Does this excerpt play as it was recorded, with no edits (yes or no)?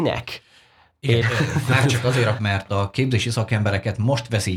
no